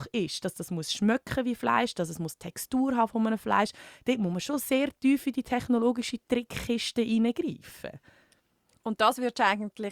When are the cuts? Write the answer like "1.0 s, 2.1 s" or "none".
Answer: none